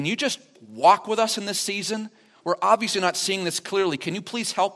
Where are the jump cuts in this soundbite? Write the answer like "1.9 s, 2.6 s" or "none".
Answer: none